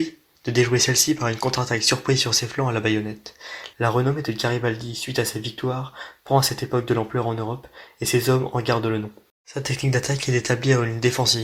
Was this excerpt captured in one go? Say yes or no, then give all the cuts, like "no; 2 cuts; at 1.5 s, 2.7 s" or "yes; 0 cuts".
no; 1 cut; at 3.7 s